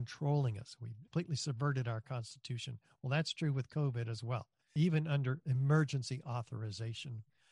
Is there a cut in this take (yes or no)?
yes